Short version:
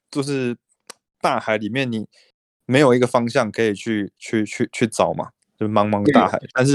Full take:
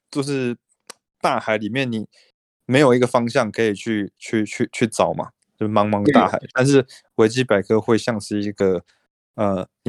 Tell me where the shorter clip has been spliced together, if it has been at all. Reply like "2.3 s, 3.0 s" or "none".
none